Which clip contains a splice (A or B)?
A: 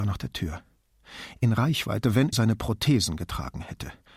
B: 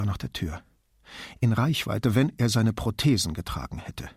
A